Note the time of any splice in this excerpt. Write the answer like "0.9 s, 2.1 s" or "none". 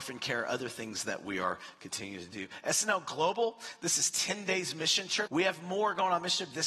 5.3 s